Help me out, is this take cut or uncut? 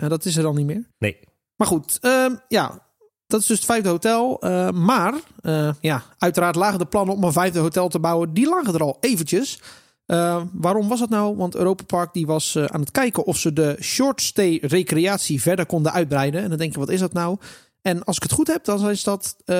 uncut